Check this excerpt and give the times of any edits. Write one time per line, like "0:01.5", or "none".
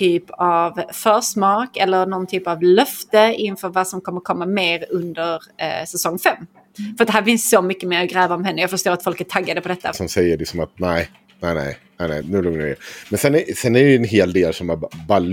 0:09.9
0:12.2